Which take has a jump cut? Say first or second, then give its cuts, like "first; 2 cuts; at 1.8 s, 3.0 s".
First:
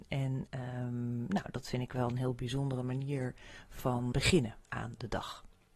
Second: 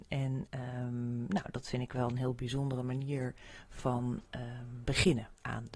first; 1 cut; at 4.1 s